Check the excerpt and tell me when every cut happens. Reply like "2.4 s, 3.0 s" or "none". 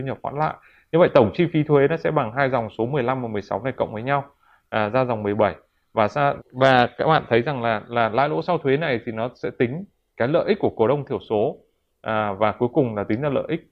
6.4 s